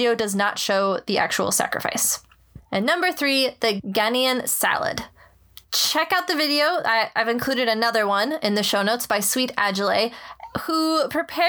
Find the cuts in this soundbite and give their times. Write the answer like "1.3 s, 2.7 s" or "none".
none